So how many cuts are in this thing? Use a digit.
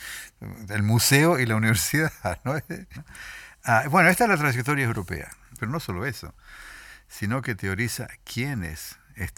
2